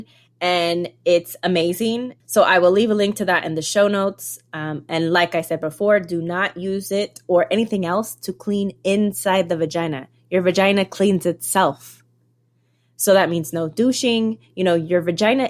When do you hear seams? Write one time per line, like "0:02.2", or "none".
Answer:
0:02.2